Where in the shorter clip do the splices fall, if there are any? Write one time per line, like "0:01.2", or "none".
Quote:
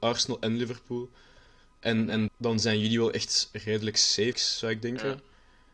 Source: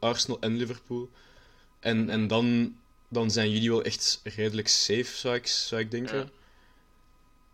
0:02.3
0:04.3